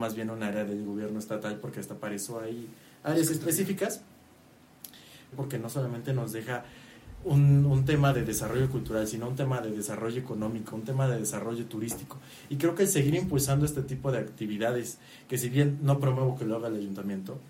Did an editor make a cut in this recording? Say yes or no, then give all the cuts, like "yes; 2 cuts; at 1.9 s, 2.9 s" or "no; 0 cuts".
yes; 1 cut; at 5.3 s